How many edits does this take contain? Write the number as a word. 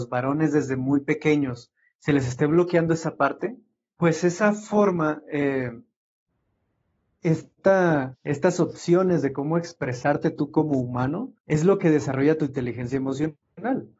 two